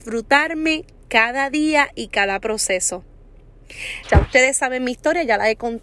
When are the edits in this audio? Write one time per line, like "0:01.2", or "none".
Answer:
0:04.0